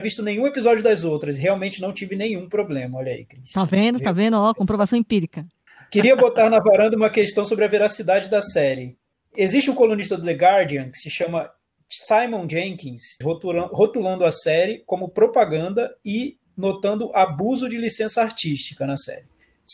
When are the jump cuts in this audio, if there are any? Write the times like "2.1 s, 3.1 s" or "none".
13.2 s